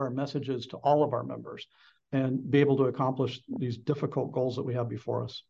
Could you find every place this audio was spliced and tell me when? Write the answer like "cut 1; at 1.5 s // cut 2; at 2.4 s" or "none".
none